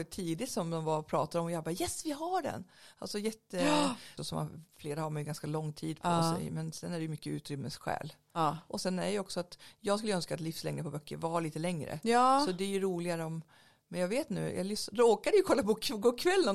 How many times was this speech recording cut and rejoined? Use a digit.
1